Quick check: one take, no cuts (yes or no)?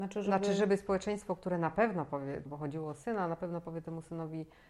no